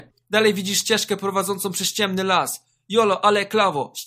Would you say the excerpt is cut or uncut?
uncut